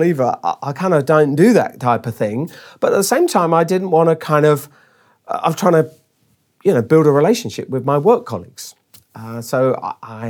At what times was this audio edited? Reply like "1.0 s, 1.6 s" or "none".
none